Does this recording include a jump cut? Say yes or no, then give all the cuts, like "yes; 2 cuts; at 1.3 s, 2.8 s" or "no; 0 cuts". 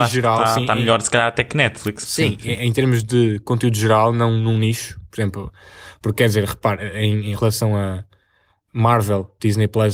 no; 0 cuts